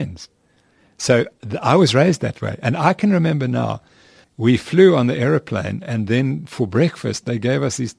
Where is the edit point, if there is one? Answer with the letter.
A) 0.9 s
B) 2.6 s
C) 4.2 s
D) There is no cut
C